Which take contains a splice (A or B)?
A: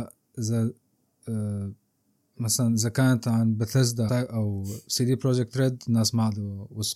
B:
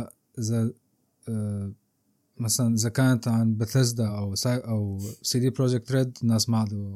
A